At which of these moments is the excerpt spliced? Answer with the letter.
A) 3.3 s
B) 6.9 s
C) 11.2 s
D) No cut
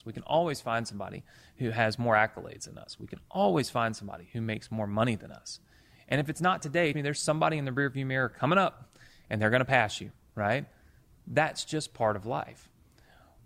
B